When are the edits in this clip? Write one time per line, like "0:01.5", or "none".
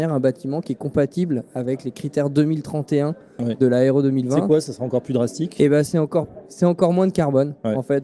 none